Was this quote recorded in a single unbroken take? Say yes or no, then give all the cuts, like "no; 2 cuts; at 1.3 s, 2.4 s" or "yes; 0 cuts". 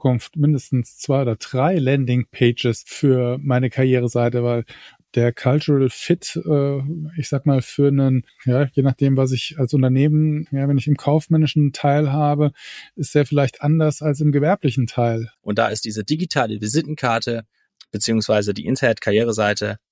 no; 1 cut; at 15.3 s